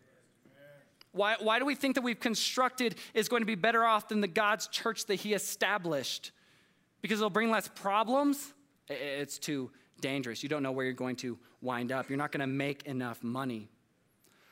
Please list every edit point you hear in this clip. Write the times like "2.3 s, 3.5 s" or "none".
8.7 s